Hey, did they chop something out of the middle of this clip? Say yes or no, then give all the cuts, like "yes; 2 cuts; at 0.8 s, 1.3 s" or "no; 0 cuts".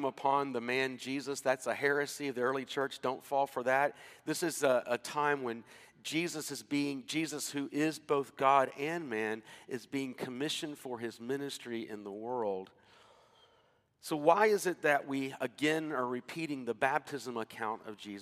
no; 0 cuts